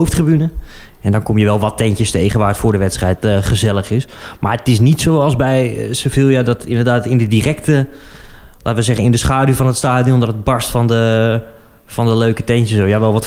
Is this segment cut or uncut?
uncut